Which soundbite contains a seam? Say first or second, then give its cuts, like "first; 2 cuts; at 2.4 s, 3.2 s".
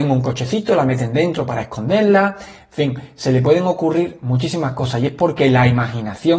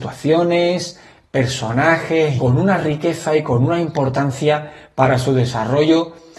second; 1 cut; at 2.4 s